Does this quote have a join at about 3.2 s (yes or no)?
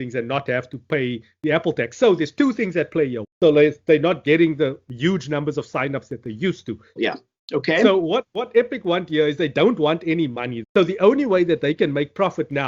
yes